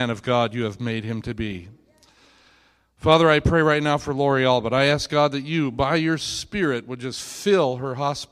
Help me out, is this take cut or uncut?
uncut